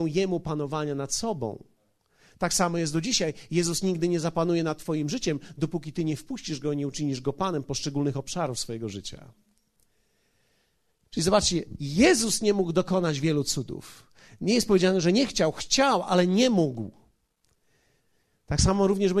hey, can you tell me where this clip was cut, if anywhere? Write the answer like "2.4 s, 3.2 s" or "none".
none